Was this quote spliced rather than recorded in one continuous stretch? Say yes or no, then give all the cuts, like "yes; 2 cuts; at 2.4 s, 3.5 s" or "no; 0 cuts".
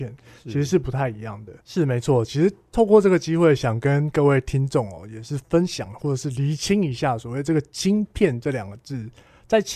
yes; 1 cut; at 1.6 s